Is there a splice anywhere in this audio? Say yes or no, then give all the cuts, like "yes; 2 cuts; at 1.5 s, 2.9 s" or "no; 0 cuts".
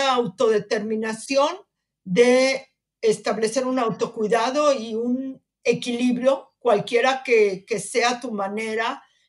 no; 0 cuts